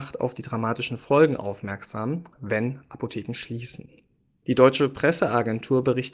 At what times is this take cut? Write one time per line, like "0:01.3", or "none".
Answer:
none